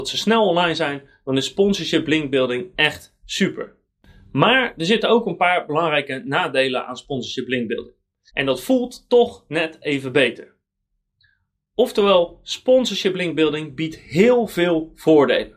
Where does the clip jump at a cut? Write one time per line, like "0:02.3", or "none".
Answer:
0:08.3